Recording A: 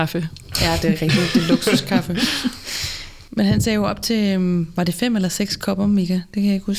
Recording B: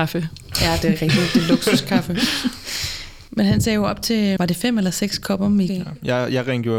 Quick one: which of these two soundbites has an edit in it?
B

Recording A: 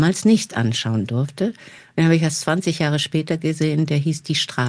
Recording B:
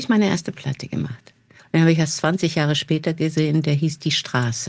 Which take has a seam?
B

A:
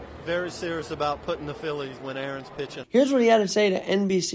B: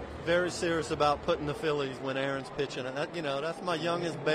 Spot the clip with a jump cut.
A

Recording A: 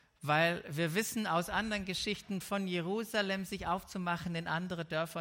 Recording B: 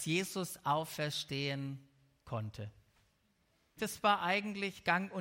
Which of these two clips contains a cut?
B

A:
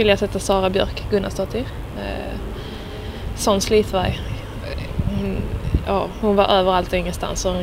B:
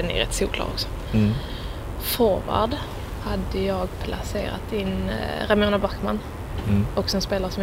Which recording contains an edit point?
A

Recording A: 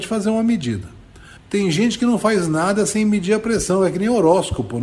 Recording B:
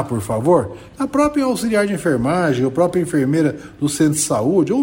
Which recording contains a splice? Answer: A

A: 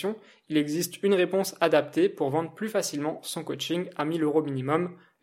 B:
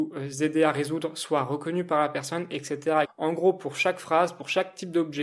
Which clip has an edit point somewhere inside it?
B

